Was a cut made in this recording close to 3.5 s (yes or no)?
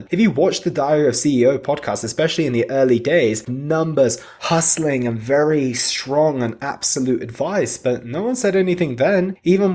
yes